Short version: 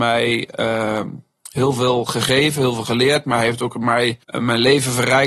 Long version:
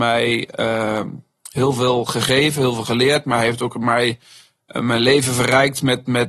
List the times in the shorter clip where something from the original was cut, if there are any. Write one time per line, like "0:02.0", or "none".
0:04.2